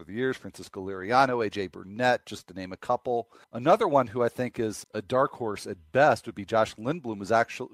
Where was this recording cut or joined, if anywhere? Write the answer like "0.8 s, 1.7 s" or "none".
3.4 s, 4.8 s

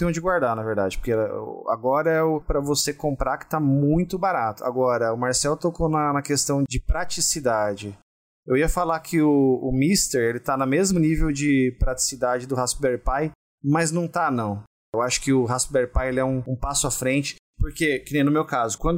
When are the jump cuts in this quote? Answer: none

